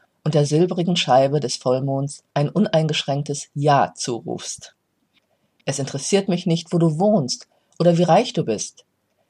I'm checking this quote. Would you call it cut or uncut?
cut